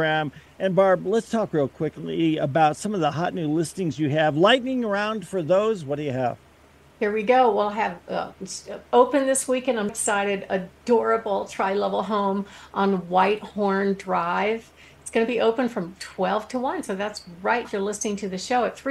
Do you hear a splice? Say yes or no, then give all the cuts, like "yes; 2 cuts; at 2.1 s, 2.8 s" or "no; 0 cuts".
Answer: yes; 2 cuts; at 9.9 s, 17.6 s